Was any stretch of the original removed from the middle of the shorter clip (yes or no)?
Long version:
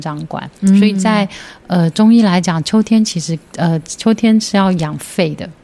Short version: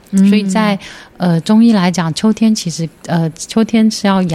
no